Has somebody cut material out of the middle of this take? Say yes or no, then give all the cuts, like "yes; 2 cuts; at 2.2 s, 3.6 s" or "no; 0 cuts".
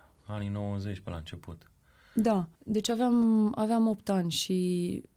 yes; 1 cut; at 2.5 s